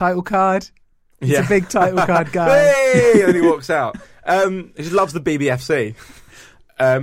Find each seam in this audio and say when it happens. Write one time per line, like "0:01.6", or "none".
none